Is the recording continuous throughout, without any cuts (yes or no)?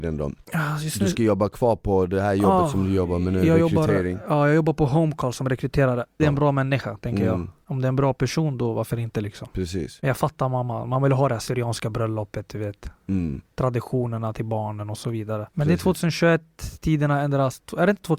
no